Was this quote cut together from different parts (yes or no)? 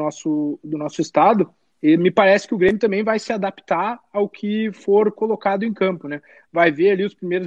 no